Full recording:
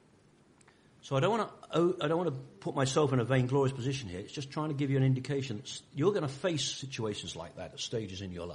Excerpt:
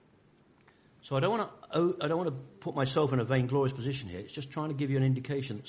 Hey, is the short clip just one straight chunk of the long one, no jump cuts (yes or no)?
yes